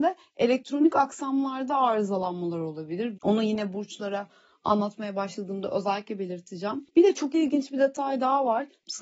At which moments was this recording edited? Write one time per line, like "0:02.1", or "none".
0:03.2